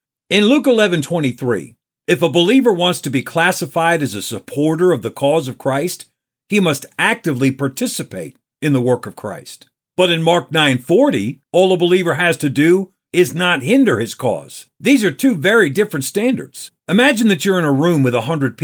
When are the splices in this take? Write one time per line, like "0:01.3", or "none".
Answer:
0:11.4
0:16.8

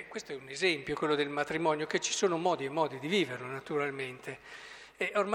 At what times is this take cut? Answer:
none

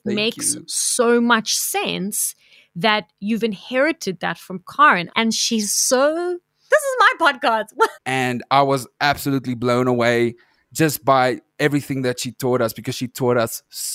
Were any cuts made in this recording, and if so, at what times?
0:05.1
0:06.7
0:07.9

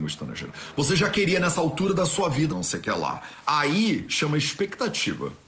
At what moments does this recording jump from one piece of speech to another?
0:02.5

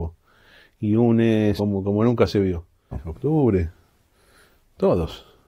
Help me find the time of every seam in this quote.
0:01.6
0:02.9

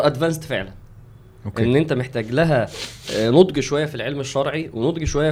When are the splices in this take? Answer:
none

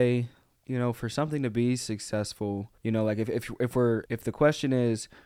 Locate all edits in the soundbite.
0:02.8
0:04.1

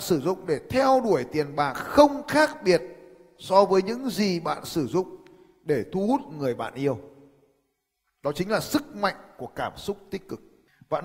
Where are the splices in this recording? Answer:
none

